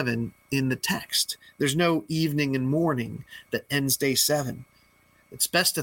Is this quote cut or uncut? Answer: uncut